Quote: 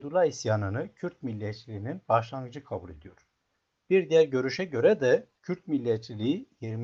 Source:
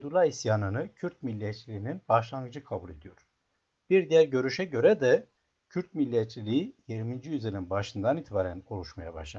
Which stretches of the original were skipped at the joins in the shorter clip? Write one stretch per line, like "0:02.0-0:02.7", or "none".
0:05.4-0:05.6